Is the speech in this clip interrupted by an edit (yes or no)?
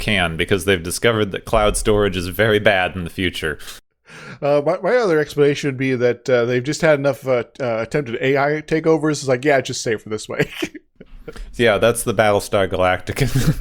no